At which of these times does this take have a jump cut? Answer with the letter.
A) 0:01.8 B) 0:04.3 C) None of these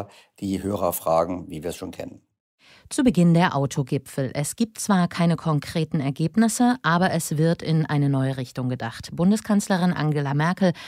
C